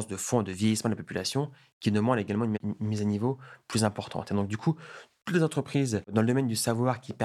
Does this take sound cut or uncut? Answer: uncut